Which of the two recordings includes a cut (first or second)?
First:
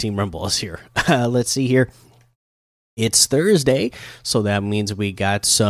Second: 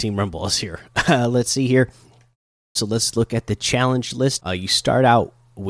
second